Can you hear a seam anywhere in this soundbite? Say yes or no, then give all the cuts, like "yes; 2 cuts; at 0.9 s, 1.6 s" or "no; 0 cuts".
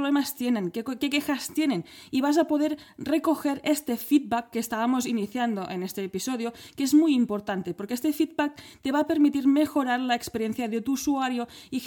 no; 0 cuts